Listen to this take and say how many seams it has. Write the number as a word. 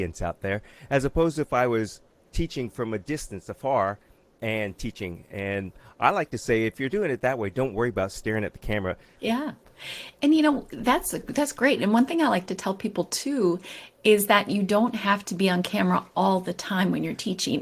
one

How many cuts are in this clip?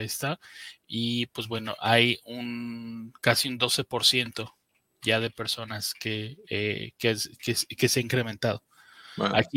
zero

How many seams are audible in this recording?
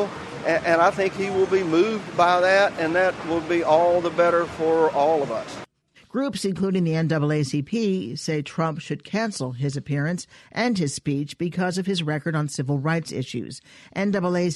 one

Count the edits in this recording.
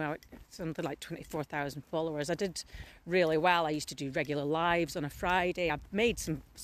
zero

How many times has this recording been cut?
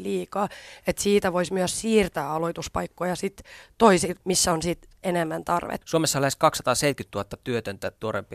two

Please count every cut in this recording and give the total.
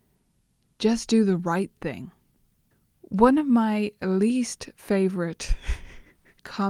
zero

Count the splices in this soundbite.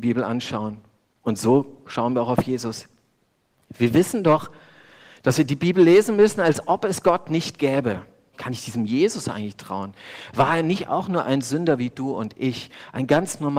one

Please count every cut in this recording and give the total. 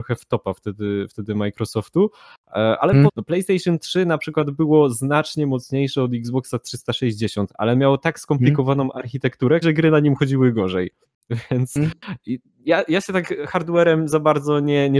two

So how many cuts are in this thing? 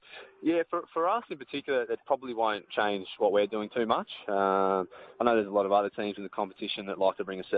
one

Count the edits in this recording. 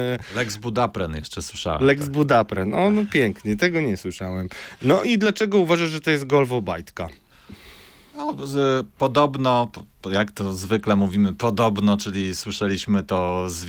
zero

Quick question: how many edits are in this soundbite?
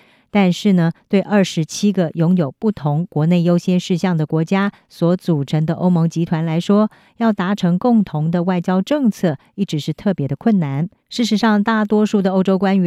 one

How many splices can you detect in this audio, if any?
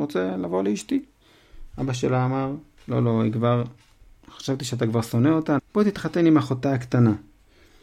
one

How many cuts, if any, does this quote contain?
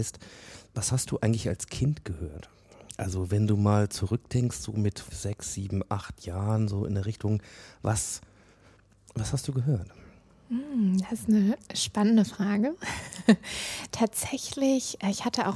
one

